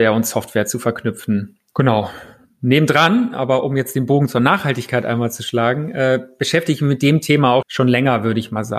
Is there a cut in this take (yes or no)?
yes